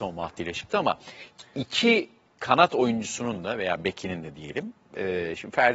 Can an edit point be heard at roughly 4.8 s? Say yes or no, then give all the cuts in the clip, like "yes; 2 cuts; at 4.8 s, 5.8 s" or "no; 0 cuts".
no; 0 cuts